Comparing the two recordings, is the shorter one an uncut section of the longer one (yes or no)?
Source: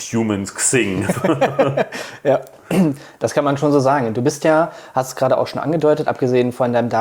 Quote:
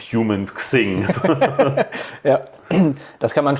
yes